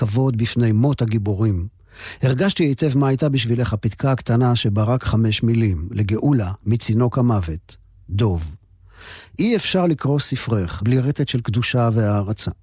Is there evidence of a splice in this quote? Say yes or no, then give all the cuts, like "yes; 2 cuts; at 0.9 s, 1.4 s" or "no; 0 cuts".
yes; 2 cuts; at 6.6 s, 10.8 s